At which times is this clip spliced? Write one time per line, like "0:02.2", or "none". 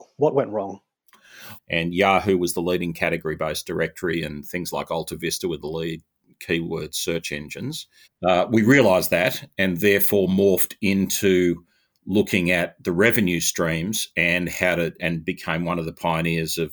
0:01.6
0:08.0
0:15.0